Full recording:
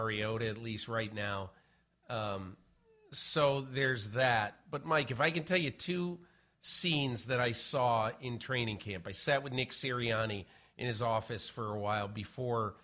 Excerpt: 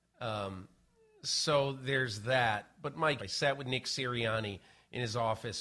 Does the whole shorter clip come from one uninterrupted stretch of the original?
no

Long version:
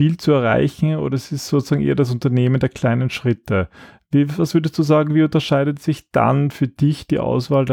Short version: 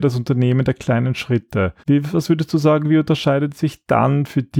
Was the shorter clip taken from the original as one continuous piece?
no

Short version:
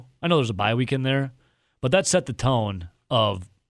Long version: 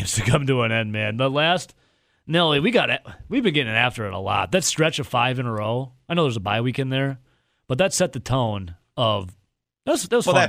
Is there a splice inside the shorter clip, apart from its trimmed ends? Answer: no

